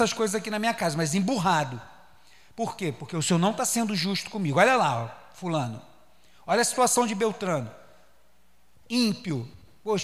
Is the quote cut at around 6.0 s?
no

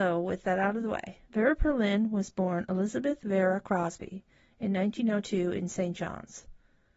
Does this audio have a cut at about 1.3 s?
yes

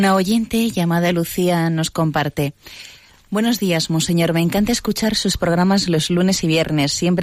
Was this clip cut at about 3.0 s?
no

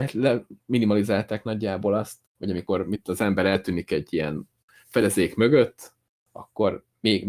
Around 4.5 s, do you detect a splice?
no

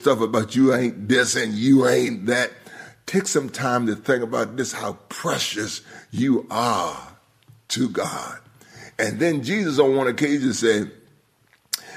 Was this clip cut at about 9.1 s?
no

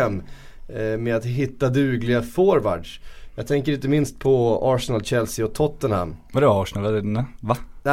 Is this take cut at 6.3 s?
no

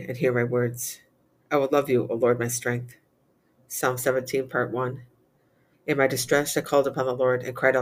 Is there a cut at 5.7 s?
yes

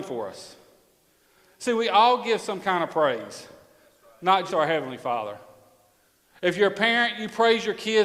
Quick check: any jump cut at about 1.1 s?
no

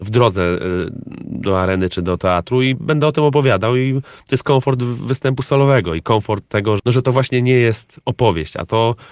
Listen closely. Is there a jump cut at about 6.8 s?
yes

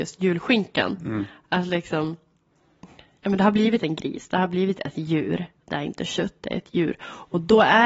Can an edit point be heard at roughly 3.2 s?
no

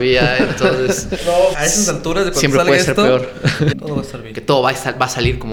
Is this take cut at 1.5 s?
yes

